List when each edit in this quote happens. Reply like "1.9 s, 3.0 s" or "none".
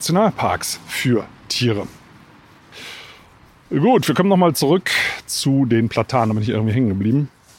none